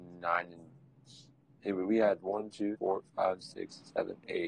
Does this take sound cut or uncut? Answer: cut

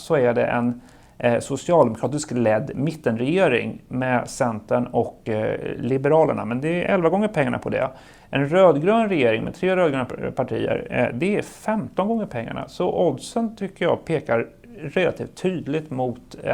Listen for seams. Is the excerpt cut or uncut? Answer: uncut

